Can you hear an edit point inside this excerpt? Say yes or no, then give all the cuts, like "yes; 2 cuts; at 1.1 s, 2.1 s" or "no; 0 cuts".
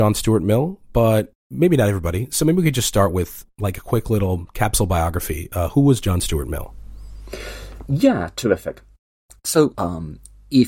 yes; 1 cut; at 9.7 s